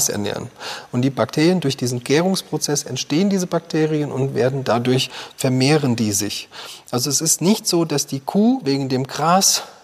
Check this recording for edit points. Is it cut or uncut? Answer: uncut